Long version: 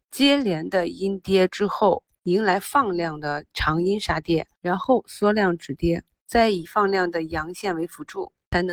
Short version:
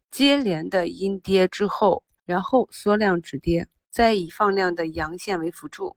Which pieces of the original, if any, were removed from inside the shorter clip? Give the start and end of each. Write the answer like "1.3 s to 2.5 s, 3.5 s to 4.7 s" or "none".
2.2 s to 4.5 s